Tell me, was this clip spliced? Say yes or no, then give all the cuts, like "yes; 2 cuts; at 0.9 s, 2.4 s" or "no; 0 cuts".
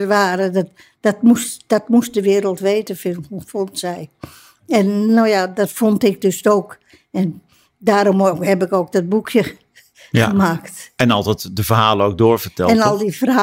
no; 0 cuts